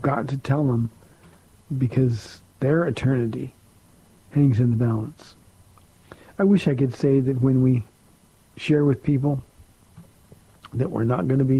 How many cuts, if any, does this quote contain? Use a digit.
0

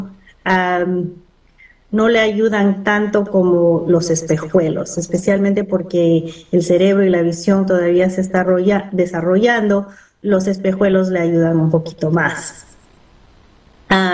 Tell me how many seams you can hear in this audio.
0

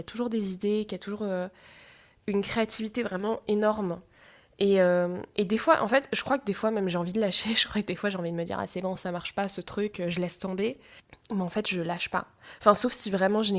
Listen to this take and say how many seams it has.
0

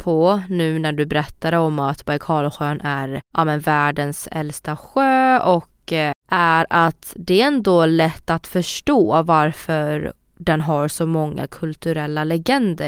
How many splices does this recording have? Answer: 2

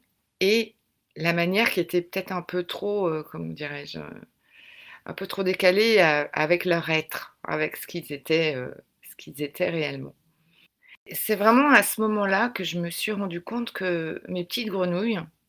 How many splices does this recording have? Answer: 1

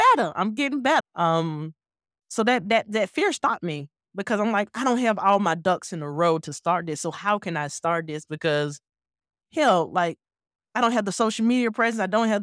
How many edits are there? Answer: 1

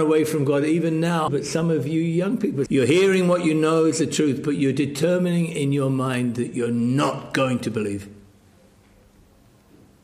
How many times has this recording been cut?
2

